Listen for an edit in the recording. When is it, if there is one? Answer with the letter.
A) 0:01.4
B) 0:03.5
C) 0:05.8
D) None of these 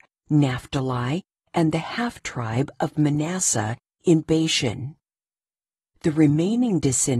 C